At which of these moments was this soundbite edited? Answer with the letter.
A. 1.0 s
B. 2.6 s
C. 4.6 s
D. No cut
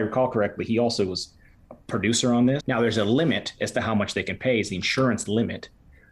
B